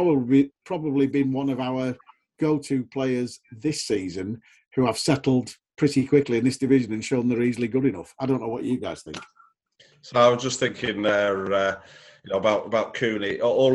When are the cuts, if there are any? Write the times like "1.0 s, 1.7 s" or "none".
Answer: none